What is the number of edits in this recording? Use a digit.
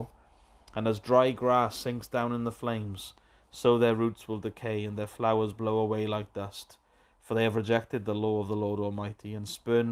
0